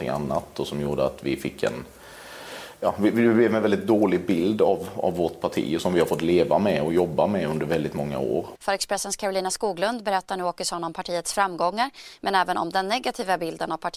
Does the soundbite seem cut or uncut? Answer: cut